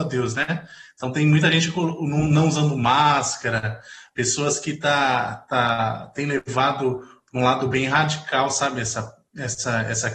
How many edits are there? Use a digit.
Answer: 0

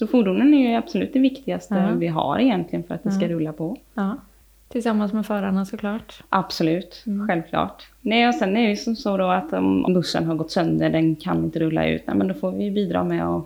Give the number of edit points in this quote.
1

